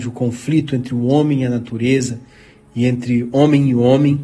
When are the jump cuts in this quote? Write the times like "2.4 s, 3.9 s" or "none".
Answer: none